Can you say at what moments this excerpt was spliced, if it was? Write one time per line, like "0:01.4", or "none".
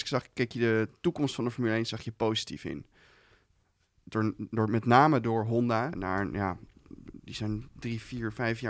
0:05.9